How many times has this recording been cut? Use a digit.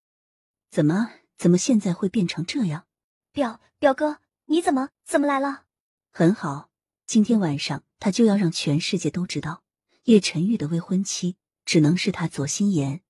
2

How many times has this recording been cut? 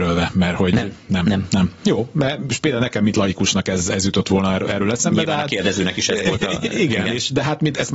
0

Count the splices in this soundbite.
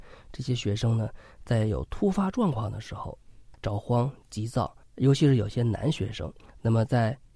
1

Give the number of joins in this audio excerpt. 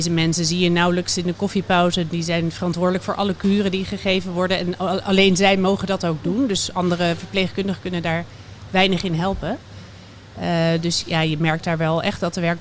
0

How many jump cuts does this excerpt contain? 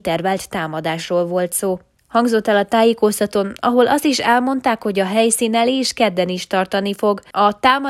1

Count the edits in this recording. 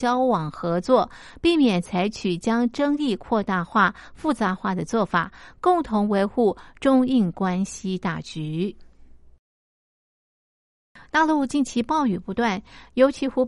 0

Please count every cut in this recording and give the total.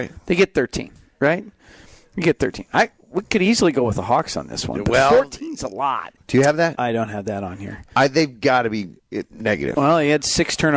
1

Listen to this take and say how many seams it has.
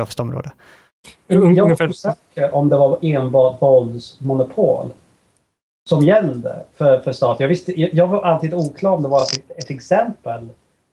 0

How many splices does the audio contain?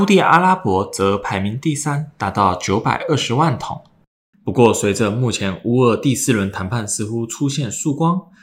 1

